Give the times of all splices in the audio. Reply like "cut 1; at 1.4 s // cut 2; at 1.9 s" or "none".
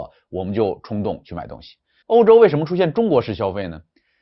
cut 1; at 2.0 s